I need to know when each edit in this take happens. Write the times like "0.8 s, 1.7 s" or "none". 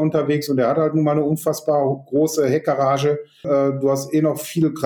3.4 s